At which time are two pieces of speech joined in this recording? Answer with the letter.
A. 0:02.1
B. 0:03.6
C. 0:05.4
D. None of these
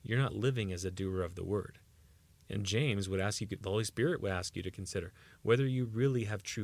B